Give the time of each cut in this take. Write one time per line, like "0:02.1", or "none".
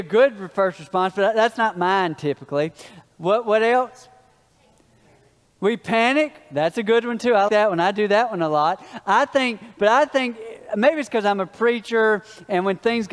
0:07.5